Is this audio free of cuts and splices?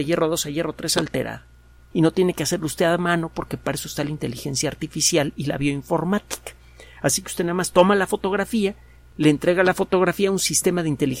no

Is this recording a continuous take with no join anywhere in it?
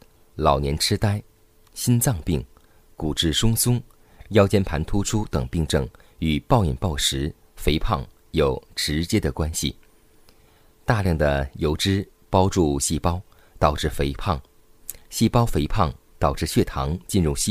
yes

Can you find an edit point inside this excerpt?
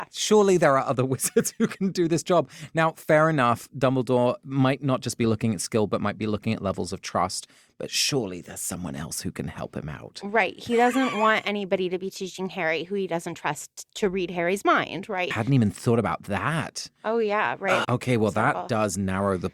yes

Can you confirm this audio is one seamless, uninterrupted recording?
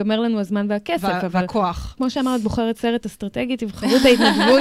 no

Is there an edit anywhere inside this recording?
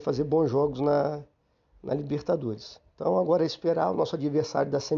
yes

